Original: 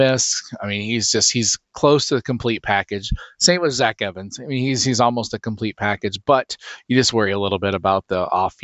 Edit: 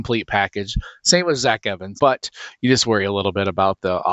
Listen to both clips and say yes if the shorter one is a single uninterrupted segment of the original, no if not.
no